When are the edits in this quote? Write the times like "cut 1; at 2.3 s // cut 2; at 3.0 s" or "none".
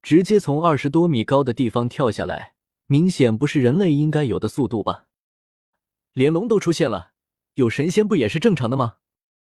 cut 1; at 2.7 s // cut 2; at 5.7 s